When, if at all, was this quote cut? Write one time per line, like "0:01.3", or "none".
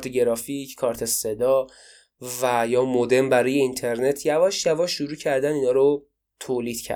none